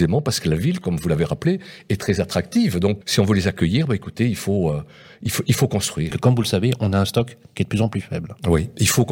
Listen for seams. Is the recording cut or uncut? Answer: cut